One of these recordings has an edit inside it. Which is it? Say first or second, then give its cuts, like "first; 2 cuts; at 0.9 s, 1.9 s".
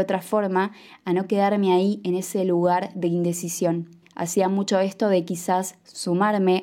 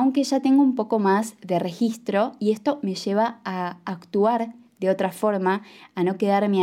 first; 1 cut; at 4.0 s